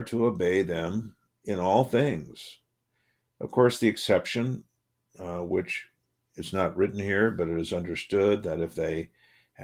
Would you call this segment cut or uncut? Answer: uncut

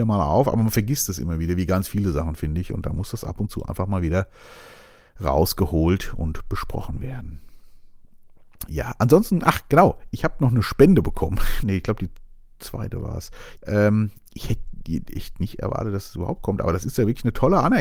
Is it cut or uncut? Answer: cut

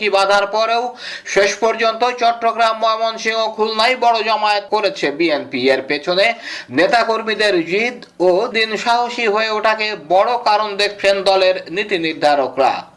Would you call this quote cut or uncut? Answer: cut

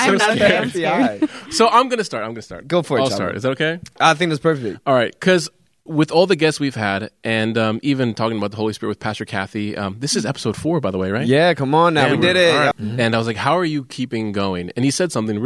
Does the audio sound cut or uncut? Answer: cut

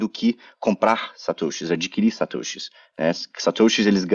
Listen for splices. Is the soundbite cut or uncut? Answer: uncut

